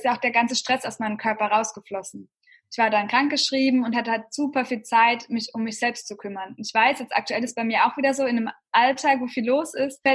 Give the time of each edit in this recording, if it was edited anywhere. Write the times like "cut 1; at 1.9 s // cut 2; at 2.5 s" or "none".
none